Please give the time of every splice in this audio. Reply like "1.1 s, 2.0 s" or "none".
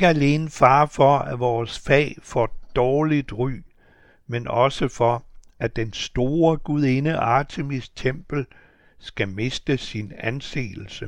none